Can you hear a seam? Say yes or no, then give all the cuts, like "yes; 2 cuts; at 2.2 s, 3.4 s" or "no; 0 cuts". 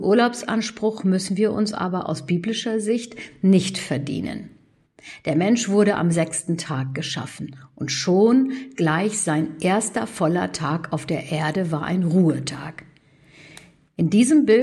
no; 0 cuts